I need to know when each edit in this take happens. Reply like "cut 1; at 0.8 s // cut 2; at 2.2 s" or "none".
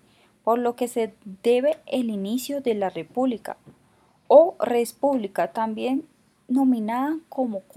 none